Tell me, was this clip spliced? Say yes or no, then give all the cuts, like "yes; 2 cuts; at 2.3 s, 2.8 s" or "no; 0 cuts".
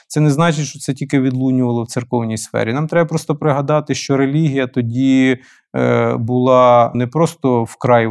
yes; 1 cut; at 6.9 s